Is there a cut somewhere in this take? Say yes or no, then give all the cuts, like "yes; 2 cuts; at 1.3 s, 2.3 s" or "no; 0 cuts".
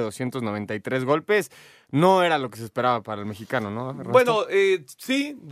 no; 0 cuts